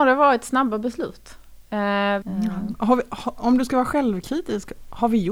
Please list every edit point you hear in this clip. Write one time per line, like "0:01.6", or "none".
0:02.2